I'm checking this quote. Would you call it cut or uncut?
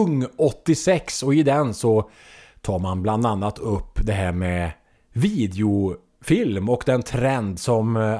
uncut